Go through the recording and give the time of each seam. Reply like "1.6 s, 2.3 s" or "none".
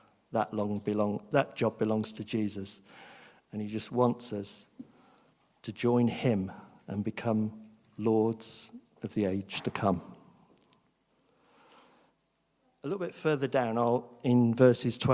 none